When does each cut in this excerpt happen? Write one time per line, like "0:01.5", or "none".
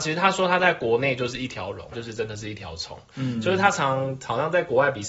0:01.9